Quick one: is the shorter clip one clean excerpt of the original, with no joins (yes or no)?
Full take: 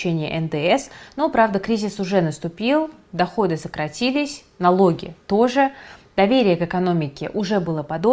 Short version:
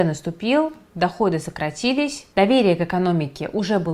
no